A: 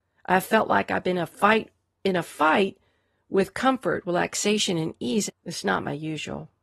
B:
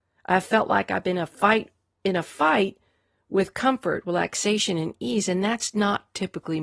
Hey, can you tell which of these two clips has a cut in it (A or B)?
A